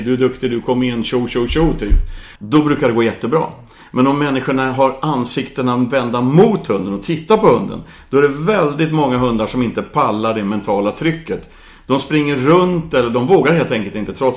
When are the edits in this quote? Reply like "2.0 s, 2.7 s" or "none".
2.4 s